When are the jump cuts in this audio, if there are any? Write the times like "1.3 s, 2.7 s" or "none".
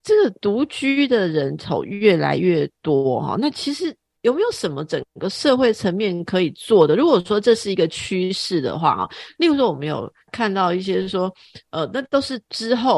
none

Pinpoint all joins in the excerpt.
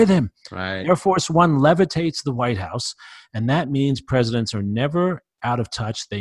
none

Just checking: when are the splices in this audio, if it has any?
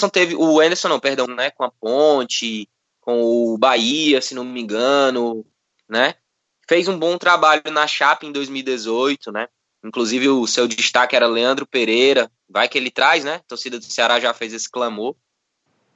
1.3 s

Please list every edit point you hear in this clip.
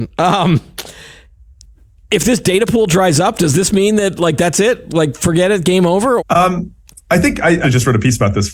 6.2 s, 7.6 s

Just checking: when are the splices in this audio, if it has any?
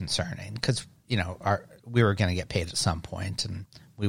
none

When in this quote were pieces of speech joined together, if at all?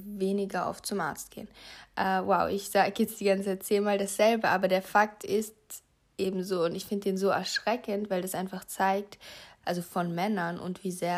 9.6 s

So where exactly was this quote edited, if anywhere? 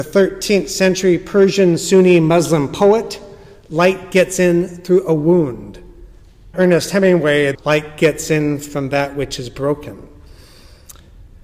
6.5 s, 7.5 s

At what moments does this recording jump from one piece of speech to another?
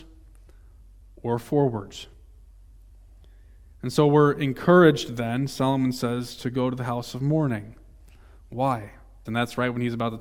9.3 s

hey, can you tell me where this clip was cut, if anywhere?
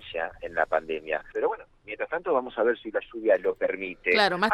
1.3 s

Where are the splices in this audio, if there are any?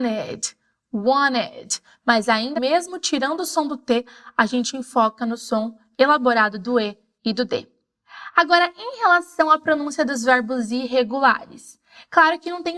2.5 s

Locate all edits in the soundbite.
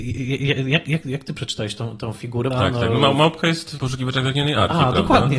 2.5 s, 3.8 s

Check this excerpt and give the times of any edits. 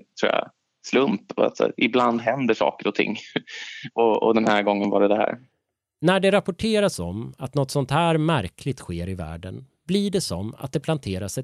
none

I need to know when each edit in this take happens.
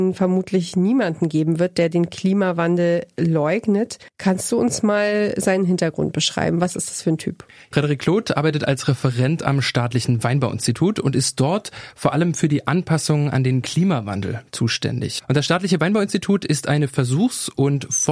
4.1 s, 15.2 s

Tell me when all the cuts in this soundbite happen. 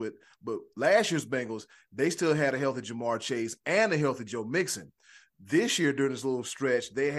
none

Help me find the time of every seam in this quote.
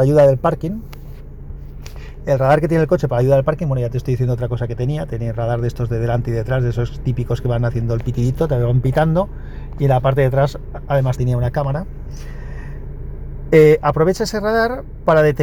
11.2 s

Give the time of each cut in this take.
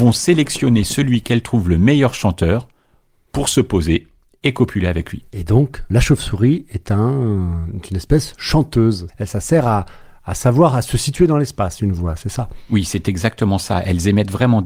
9.1 s

